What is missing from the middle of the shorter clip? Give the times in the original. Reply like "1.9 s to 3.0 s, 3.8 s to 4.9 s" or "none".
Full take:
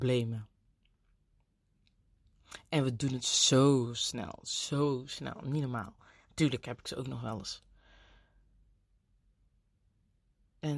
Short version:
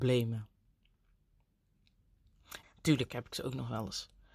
2.6 s to 6.2 s